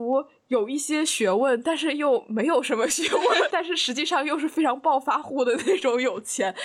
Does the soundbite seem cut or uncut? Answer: cut